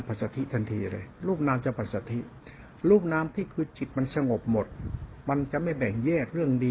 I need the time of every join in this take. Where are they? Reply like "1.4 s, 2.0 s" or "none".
3.3 s